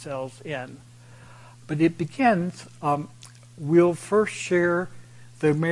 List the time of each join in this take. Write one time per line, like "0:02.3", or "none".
0:01.5